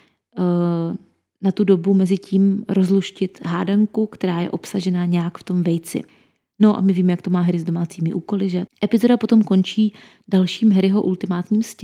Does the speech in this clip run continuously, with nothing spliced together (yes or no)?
no